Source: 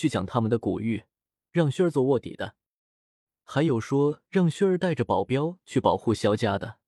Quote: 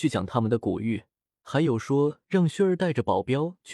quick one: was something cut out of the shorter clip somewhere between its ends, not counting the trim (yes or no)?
yes